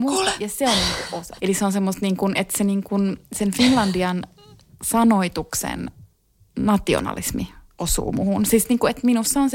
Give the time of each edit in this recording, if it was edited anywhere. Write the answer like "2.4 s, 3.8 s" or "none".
1.4 s